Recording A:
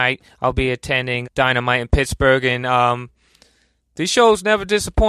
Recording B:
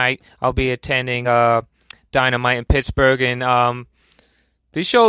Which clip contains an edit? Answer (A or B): A